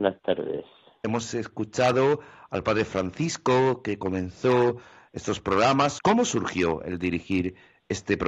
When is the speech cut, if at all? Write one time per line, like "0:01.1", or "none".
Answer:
0:01.0
0:06.0